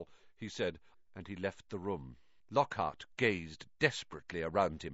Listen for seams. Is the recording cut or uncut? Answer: cut